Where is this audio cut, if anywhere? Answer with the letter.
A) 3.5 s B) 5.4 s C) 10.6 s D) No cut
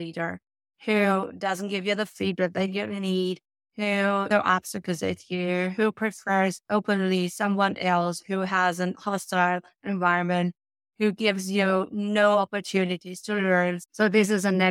D